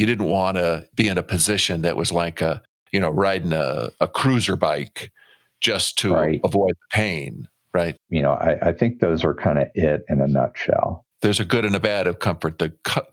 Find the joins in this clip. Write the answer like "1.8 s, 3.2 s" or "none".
8.0 s, 11.1 s